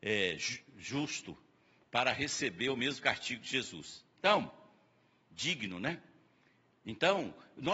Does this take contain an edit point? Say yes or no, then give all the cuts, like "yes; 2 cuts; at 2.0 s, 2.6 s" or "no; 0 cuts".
no; 0 cuts